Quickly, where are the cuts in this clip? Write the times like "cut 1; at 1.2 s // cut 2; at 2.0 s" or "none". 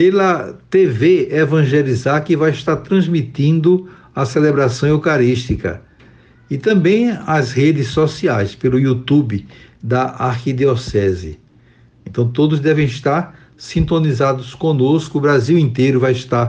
none